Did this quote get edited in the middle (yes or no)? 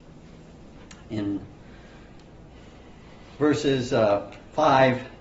no